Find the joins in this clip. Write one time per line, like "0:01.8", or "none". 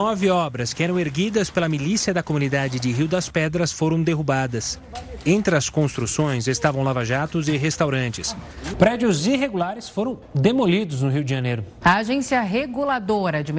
0:08.7
0:11.8